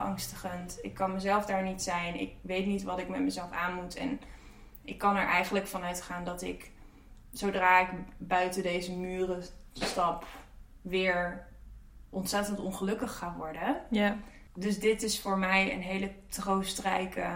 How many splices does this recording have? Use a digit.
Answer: 1